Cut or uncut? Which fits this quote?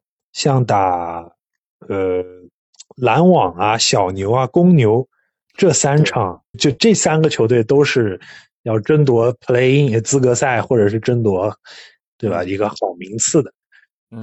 cut